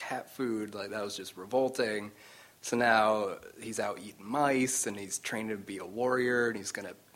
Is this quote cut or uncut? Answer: uncut